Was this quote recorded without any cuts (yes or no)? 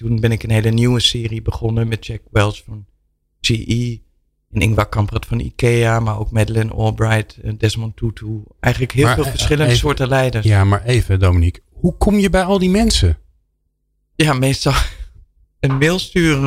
yes